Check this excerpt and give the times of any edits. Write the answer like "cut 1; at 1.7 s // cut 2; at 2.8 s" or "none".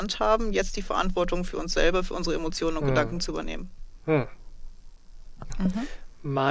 cut 1; at 5.5 s